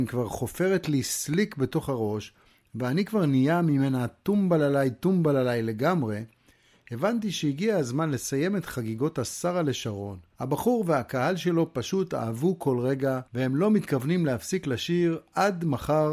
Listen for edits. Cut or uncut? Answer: cut